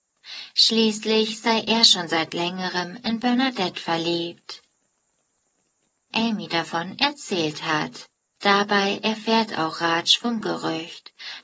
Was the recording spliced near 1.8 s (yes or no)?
no